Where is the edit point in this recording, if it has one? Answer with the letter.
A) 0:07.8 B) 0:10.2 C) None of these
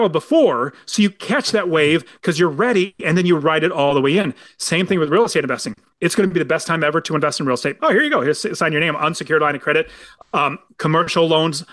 A